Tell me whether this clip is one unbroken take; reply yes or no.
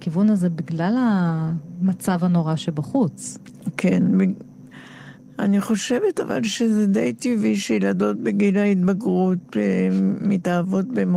yes